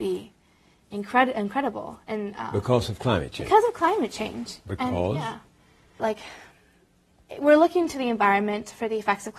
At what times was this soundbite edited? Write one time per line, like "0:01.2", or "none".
0:06.0